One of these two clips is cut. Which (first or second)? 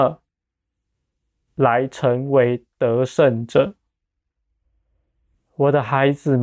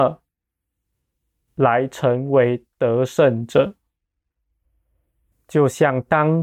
second